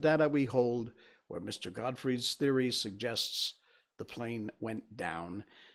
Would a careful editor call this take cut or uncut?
uncut